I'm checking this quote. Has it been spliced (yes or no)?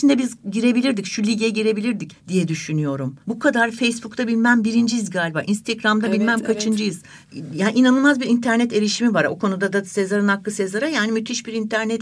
no